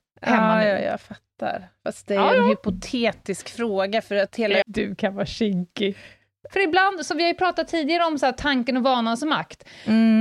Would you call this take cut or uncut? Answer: cut